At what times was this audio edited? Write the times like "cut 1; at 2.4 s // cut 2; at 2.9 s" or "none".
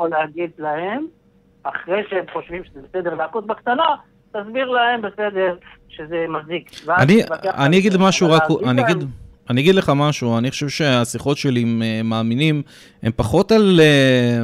none